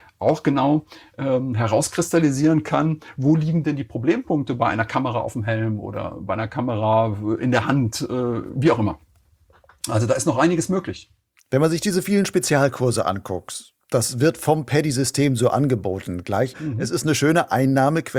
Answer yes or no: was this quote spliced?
yes